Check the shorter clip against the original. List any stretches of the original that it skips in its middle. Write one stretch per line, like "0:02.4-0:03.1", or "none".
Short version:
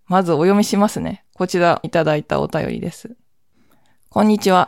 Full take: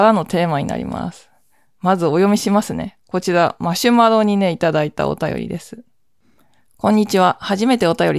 0:03.6-0:04.5